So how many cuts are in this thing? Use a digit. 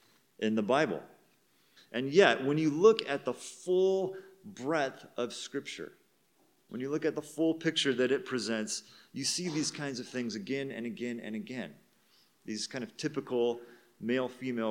1